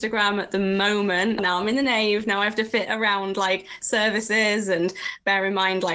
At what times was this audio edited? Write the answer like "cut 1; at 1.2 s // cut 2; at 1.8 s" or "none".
cut 1; at 1.4 s